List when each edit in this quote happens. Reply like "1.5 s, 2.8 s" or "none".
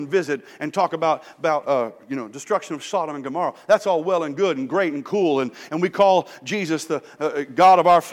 1.7 s, 7.2 s